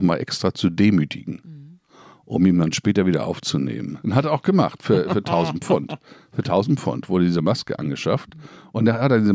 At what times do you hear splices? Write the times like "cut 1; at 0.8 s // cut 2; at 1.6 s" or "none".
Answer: cut 1; at 4.0 s